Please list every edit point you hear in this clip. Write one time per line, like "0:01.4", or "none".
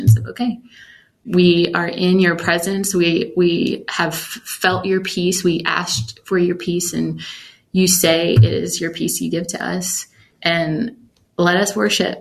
none